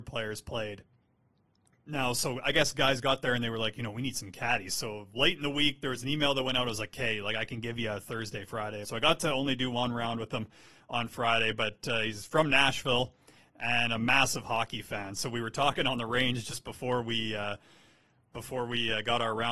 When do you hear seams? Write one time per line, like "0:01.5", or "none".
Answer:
0:08.8